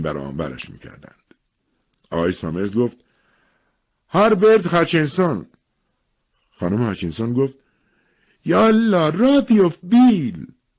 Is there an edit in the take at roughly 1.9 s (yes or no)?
no